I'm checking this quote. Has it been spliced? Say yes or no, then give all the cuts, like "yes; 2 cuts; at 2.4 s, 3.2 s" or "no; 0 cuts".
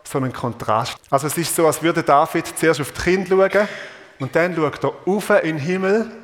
yes; 1 cut; at 1.0 s